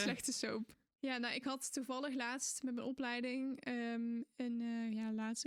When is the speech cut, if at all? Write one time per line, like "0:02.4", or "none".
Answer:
0:00.9